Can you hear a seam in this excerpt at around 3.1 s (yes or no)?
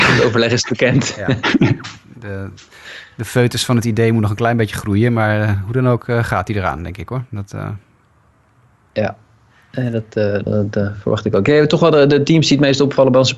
no